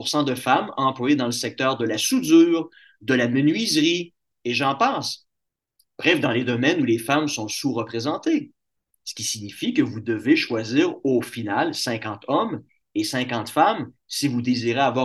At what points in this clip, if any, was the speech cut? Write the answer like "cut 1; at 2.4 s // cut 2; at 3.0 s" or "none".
cut 1; at 4.3 s // cut 2; at 8.9 s